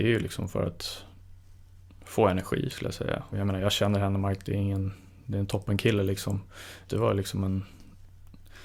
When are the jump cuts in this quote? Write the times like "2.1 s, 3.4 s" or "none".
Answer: 3.3 s, 6.9 s